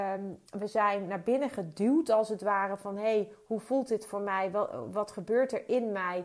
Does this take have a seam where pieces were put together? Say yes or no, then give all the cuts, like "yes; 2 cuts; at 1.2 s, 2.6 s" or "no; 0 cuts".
no; 0 cuts